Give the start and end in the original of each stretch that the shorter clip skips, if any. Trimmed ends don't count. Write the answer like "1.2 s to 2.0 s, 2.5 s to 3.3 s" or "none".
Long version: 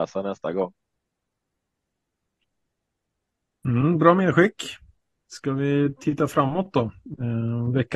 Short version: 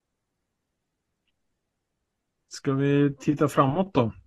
3.5 s to 5.2 s

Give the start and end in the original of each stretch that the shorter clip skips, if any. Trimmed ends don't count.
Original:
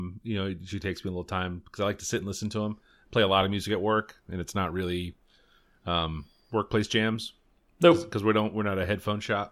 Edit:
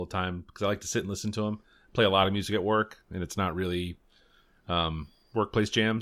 none

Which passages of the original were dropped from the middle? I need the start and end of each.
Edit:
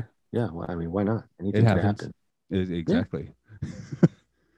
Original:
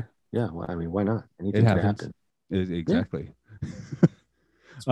none

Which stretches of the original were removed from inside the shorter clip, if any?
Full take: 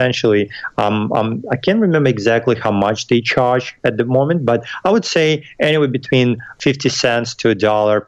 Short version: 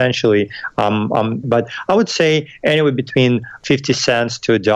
1.4 s to 4.4 s

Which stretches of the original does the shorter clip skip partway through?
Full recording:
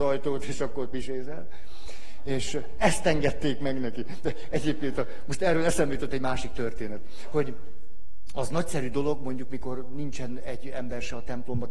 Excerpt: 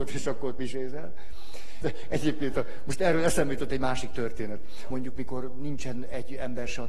2.2 s to 4.2 s, 7.3 s to 9.2 s

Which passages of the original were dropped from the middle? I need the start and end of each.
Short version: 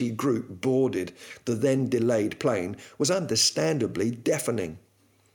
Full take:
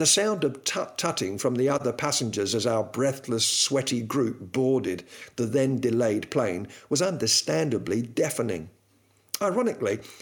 none

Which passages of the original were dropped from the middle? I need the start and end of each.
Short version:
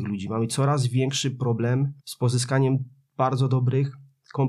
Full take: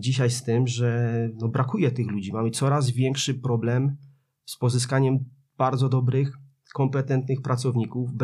4.0 s to 4.4 s

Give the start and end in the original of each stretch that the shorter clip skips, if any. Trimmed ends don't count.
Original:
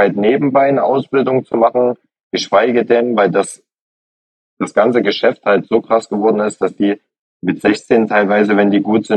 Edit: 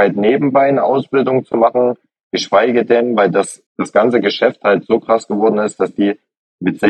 3.7 s to 4.5 s

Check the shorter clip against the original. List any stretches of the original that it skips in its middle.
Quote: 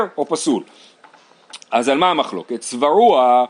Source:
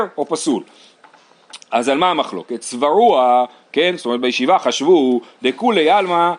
none

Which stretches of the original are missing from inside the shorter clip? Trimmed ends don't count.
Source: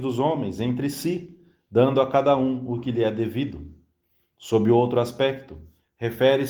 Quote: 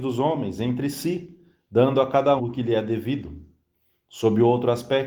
2.4 s to 2.7 s

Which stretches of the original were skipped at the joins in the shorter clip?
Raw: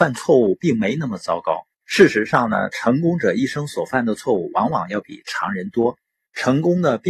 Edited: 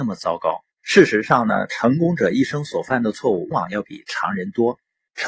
4.5 s to 4.7 s

